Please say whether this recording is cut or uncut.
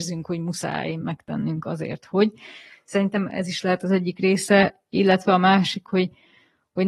uncut